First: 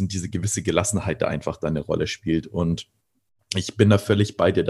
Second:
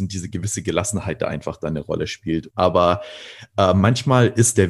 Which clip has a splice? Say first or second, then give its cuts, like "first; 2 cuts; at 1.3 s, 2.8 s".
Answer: second; 1 cut; at 2.5 s